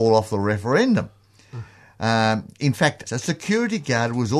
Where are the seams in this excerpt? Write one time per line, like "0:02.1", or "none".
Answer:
0:03.1